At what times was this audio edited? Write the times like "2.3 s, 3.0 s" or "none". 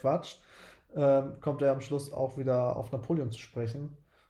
none